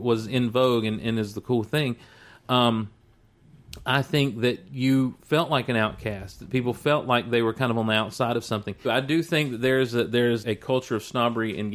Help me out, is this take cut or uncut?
cut